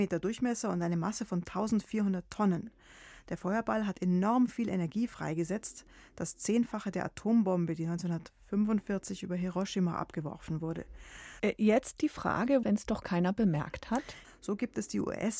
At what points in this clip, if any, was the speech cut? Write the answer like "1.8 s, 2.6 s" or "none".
11.4 s, 12.6 s, 14.2 s